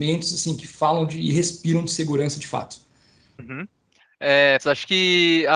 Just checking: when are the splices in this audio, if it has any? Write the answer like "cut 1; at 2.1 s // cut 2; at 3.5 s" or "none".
cut 1; at 3.4 s // cut 2; at 4.6 s